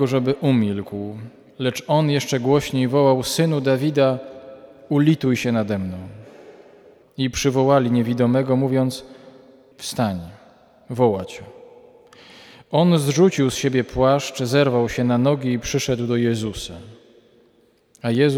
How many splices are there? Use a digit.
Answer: 2